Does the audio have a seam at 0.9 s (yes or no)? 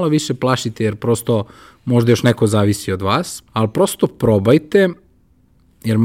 no